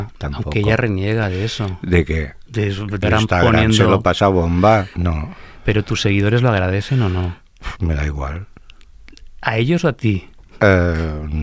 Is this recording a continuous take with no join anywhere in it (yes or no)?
no